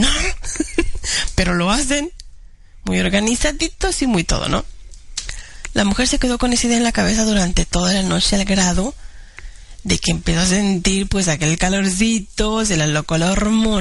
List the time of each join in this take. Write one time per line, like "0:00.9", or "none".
none